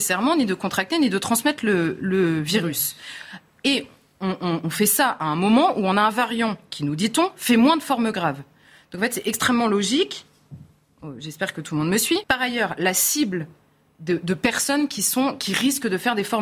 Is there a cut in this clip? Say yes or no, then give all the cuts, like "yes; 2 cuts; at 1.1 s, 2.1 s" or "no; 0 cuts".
yes; 1 cut; at 12.2 s